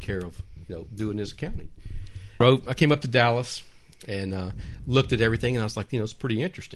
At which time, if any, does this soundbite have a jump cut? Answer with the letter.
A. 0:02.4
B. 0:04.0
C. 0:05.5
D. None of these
A